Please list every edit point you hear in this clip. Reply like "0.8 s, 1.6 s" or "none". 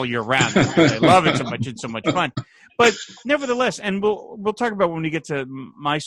none